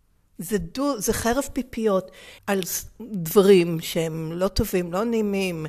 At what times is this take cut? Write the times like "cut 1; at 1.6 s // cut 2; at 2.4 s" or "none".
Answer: cut 1; at 2.4 s

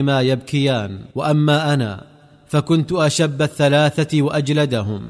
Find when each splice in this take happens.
cut 1; at 1.1 s

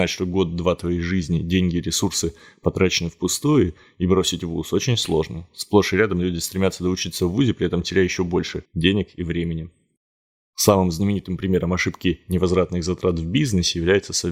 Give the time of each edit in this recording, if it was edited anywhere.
none

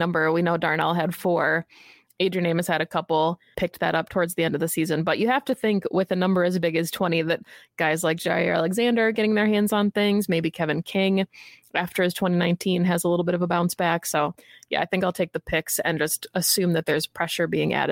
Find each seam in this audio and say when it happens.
cut 1; at 3.5 s

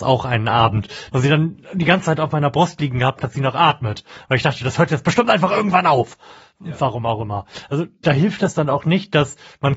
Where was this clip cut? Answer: cut 1; at 1.1 s // cut 2; at 3.2 s

